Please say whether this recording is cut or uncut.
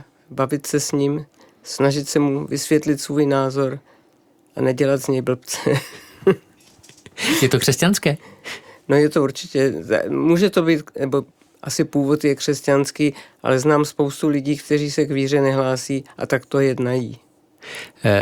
uncut